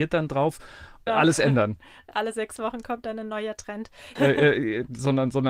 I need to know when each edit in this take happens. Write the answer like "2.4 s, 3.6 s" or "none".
1.1 s, 4.2 s